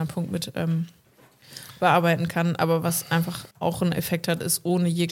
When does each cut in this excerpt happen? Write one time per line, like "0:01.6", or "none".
0:03.5